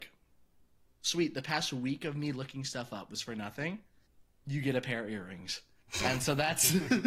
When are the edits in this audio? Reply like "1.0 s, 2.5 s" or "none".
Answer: none